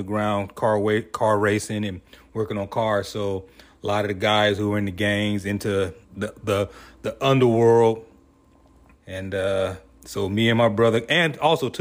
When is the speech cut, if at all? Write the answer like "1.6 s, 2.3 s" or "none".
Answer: 6.0 s, 8.9 s